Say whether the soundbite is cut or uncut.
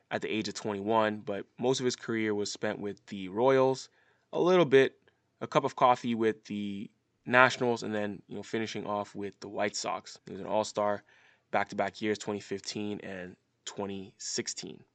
cut